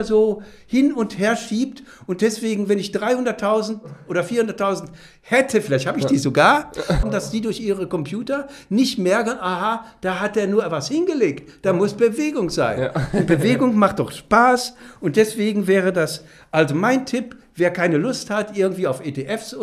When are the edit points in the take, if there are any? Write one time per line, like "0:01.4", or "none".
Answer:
0:07.0